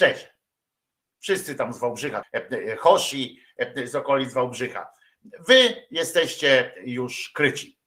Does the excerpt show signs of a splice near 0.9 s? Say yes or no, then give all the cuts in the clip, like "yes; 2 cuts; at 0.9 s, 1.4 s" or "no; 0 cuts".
no; 1 cut; at 2.2 s